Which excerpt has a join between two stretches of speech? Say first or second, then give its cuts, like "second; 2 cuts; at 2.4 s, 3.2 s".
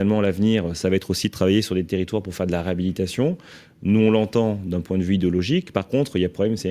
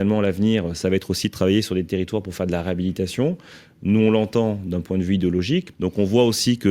second; 1 cut; at 5.7 s